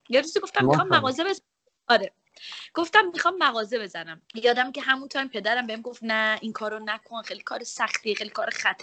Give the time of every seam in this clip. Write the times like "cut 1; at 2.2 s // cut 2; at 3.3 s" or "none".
cut 1; at 4.2 s